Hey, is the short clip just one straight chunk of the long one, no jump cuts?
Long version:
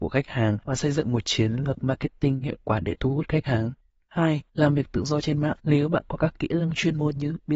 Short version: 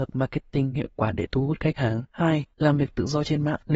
no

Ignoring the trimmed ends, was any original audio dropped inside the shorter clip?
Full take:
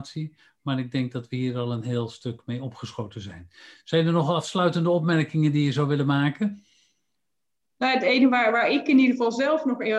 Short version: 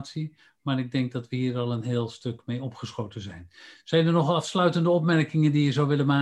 no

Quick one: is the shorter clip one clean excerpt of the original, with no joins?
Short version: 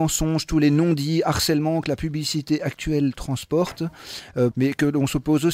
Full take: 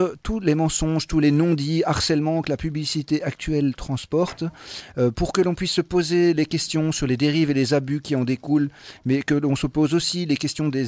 no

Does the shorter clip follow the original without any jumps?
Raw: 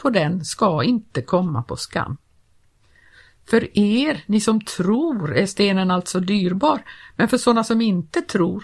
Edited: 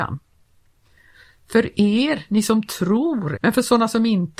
no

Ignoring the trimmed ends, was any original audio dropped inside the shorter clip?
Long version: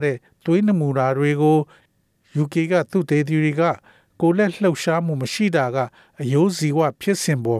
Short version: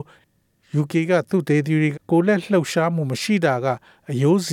yes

